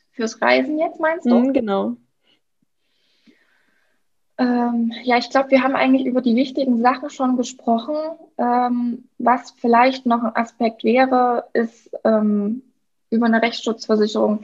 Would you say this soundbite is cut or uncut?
uncut